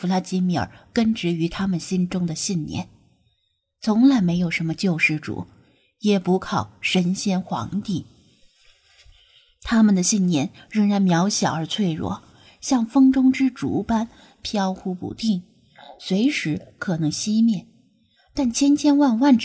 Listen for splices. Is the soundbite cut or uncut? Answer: uncut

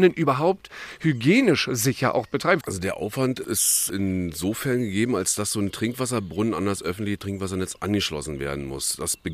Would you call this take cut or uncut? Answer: cut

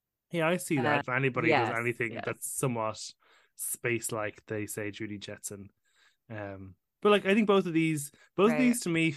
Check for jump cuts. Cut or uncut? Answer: cut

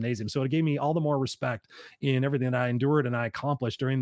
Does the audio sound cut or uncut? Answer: uncut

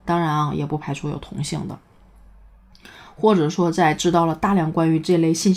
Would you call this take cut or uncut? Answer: uncut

